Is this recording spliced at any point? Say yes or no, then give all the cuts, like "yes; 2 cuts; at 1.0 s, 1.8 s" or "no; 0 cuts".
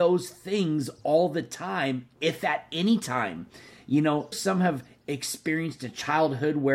yes; 1 cut; at 4.3 s